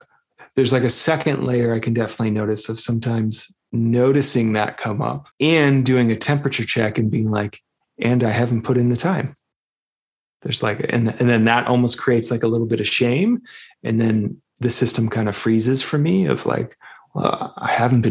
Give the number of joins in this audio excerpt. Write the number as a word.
one